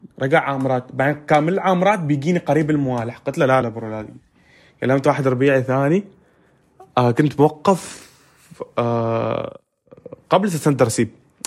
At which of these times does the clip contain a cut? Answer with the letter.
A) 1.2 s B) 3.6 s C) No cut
B